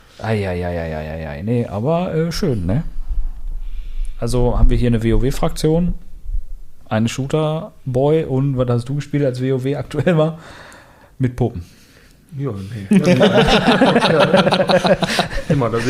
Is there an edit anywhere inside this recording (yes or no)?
no